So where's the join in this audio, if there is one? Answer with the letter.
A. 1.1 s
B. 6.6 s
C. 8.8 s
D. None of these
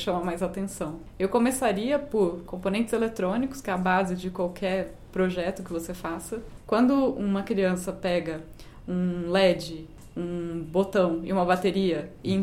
B